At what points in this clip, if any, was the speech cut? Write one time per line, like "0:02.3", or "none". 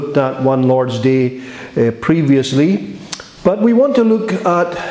0:03.4